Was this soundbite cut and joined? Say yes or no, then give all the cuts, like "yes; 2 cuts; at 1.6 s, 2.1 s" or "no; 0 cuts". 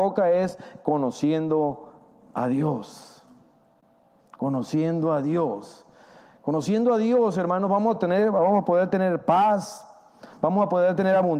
no; 0 cuts